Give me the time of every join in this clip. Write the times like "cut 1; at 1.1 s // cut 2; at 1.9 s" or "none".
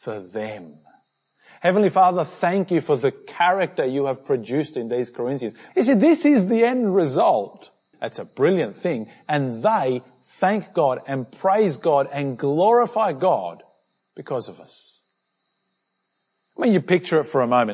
cut 1; at 5.7 s // cut 2; at 7.9 s